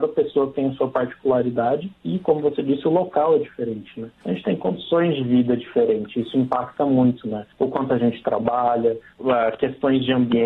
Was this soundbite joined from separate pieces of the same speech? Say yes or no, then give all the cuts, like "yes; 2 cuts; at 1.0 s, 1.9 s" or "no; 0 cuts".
yes; 1 cut; at 9.2 s